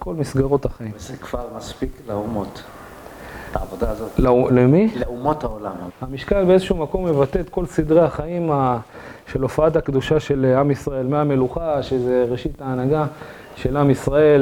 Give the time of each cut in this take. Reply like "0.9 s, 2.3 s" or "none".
5.9 s